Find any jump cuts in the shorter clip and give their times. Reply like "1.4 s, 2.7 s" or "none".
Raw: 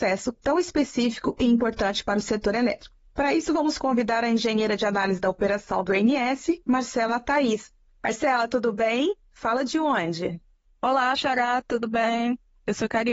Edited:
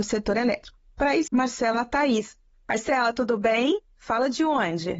1.3 s